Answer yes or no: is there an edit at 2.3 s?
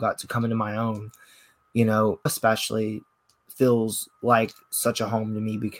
yes